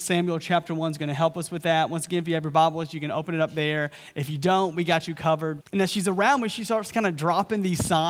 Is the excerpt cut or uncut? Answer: cut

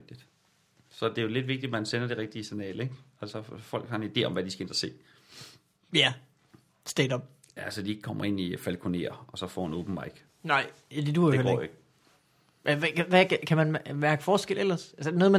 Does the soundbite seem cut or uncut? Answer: uncut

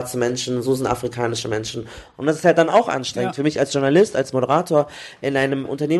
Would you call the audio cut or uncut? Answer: cut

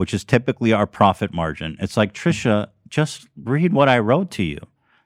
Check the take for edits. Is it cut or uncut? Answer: uncut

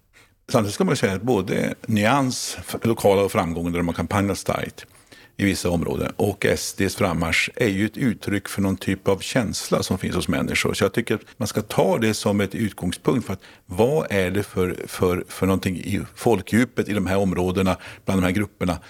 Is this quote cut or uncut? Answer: cut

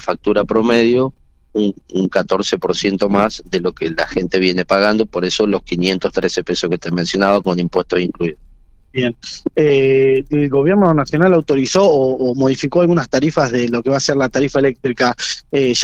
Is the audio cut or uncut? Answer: uncut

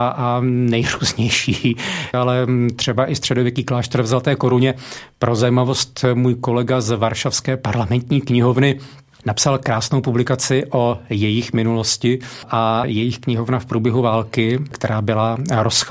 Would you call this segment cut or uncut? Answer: cut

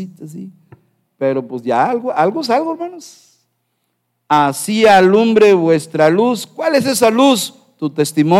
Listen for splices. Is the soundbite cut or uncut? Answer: uncut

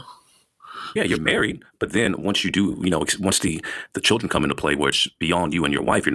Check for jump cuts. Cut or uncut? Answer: cut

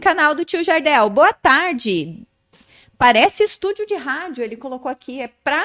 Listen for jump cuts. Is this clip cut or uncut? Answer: uncut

